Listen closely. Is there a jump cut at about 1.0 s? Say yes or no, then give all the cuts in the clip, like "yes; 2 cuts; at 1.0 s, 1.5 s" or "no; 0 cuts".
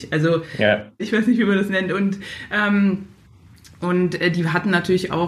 yes; 1 cut; at 1.0 s